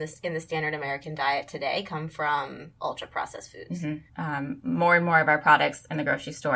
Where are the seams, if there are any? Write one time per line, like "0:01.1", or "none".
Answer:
0:04.1